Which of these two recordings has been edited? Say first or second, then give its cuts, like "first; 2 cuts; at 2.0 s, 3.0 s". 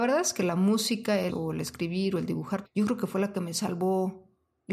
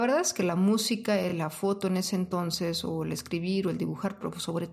first; 2 cuts; at 1.3 s, 2.6 s